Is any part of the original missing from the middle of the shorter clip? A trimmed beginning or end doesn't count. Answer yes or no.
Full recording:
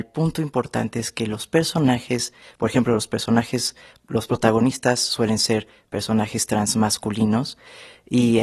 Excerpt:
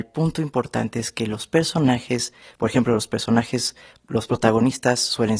no